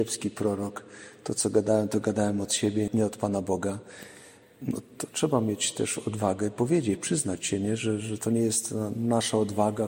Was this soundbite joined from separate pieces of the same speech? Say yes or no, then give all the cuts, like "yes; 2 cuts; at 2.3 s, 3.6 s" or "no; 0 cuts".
yes; 1 cut; at 2.9 s